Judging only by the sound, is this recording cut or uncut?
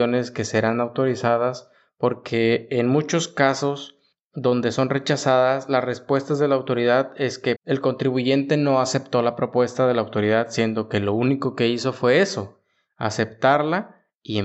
cut